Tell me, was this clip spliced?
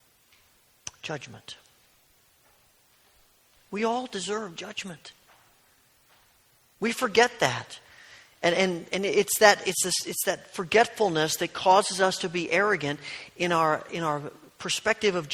no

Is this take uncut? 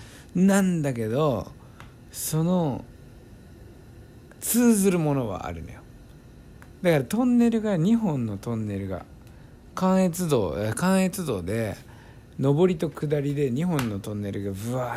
no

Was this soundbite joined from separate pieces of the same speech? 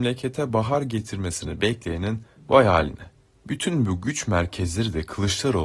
yes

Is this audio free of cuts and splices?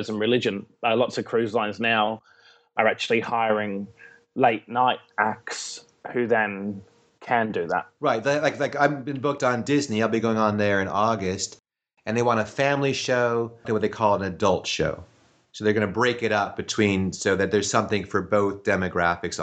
no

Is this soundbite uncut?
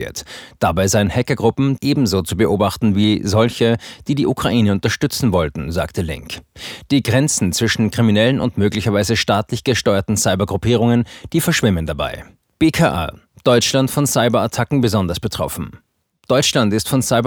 no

